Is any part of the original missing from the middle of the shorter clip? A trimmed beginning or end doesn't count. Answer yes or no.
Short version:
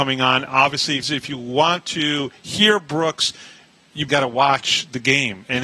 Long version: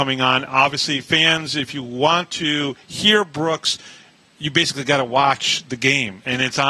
yes